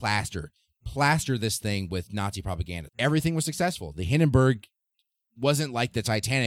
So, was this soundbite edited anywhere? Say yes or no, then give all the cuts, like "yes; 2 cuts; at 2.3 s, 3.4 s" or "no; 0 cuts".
yes; 1 cut; at 2.9 s